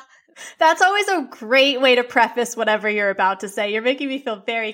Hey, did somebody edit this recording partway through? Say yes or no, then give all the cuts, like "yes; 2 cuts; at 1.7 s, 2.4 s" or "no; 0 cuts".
no; 0 cuts